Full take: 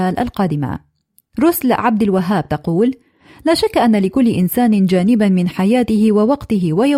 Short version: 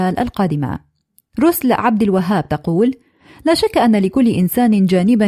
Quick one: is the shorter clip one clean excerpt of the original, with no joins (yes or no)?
yes